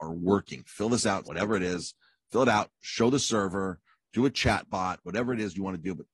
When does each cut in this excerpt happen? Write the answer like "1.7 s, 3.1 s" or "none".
1.2 s

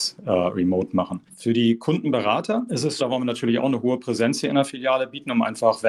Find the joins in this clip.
1.3 s, 3.0 s

